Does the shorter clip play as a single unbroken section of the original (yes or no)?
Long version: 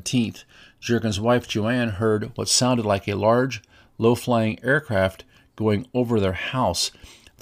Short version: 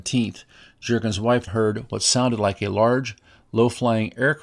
no